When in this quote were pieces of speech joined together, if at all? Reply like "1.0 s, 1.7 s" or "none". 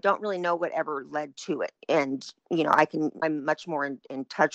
1.8 s, 3.2 s

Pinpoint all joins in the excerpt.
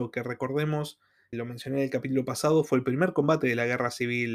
1.3 s

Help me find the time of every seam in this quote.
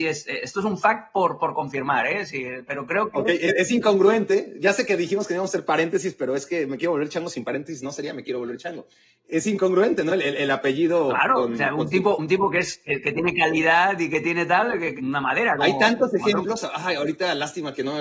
none

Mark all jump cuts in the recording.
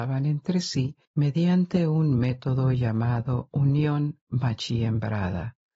1.0 s

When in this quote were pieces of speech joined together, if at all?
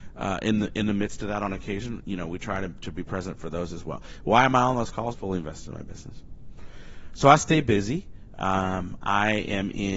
5.1 s

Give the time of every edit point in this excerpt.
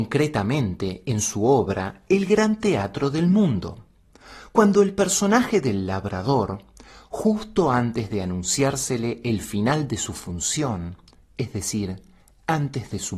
none

